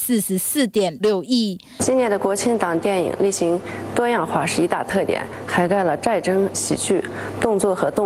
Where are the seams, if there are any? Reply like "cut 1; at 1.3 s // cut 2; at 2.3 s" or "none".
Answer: cut 1; at 1.0 s // cut 2; at 6.5 s